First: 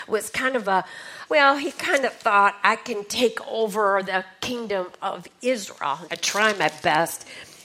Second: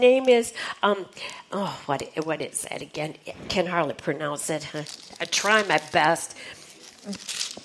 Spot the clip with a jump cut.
first; 2 cuts; at 1.3 s, 6.1 s

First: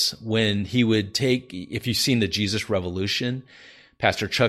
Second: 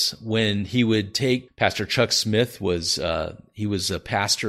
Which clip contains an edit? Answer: second; 1 cut; at 1.5 s

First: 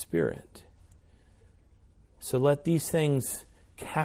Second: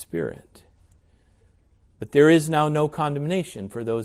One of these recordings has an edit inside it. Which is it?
second; 1 cut; at 1.9 s

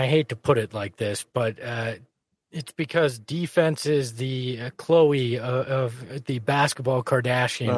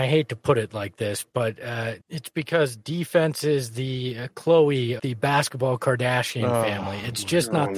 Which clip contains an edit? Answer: second; 2 cuts; at 2.0 s, 5.0 s

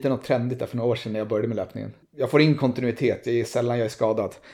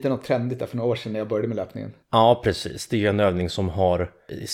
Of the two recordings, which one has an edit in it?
first; 1 cut; at 2.0 s

